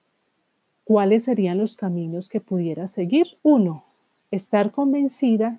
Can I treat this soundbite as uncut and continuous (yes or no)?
no